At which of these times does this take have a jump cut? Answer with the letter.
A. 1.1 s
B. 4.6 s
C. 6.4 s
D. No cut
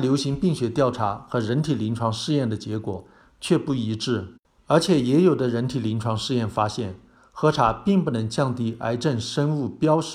B